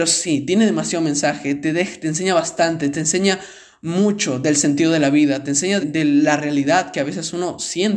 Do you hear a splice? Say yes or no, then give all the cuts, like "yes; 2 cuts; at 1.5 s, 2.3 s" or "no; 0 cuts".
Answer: yes; 1 cut; at 5.8 s